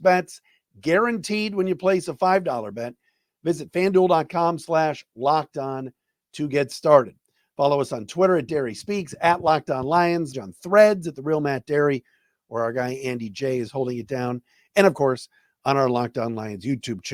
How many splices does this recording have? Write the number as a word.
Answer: one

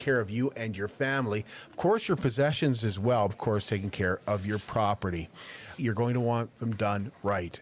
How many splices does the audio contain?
two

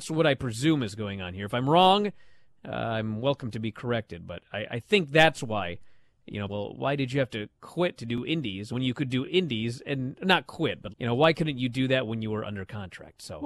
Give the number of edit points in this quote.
two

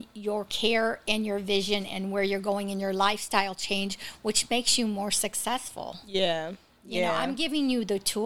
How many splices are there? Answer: zero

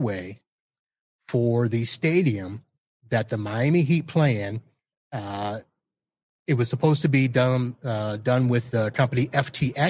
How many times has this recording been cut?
one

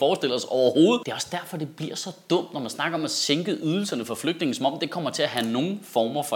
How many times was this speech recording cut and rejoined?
one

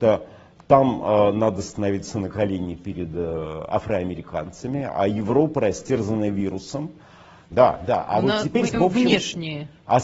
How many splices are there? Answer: two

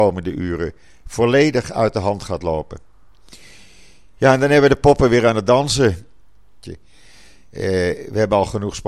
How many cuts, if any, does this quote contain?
one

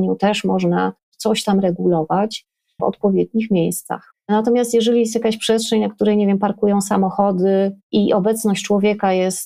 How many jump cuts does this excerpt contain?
two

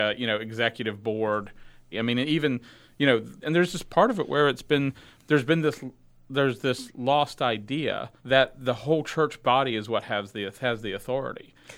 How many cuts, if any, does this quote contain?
three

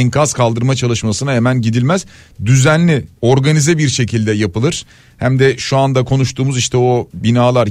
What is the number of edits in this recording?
one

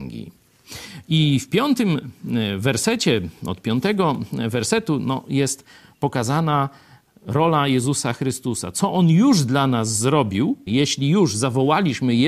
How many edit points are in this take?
one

